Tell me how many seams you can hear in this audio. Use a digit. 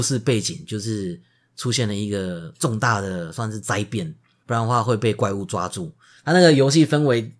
2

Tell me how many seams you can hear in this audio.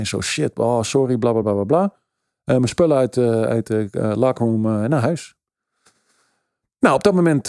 0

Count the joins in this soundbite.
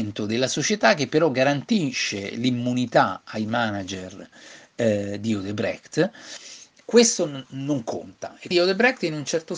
2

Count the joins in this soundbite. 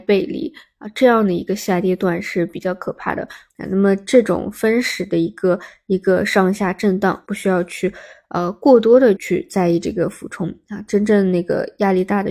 3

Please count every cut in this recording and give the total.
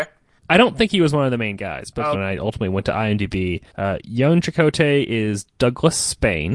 2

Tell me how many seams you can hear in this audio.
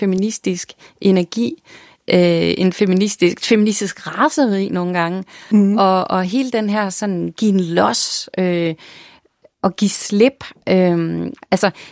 0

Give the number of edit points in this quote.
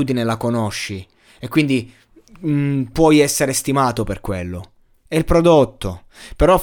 1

